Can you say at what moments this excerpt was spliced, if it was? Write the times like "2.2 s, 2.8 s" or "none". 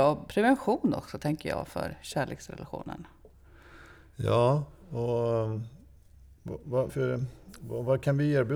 6.9 s